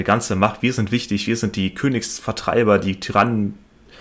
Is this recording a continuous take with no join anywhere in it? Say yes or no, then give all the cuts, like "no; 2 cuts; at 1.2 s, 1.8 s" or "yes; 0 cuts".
yes; 0 cuts